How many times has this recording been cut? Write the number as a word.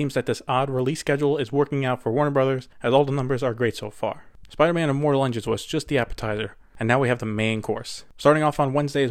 one